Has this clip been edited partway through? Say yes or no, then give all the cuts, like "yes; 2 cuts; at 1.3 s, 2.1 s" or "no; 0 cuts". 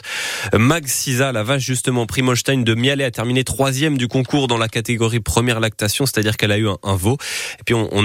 no; 0 cuts